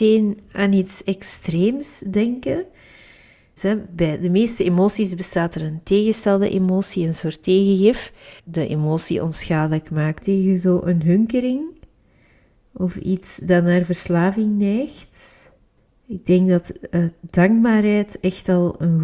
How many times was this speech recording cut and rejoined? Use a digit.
3